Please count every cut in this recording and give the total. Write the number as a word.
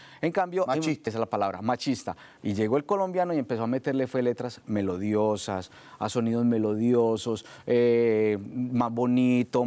two